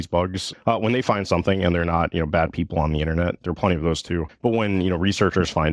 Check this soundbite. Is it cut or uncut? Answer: uncut